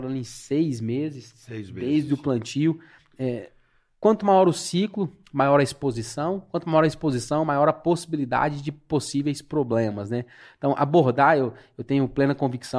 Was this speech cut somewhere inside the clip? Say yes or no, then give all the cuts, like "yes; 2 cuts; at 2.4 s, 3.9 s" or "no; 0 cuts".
no; 0 cuts